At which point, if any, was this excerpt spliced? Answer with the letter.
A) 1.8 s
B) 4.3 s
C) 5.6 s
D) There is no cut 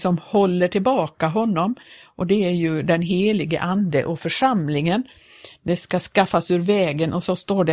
D